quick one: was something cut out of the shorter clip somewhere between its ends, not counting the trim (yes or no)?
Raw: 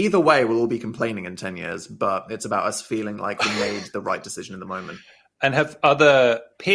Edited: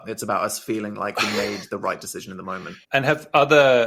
yes